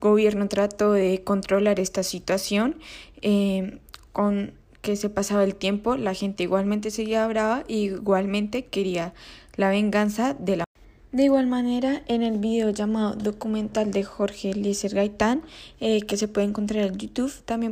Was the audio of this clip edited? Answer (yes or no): no